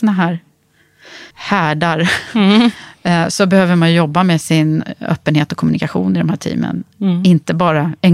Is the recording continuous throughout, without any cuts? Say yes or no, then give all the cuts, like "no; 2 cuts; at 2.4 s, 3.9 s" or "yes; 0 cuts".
no; 1 cut; at 1.3 s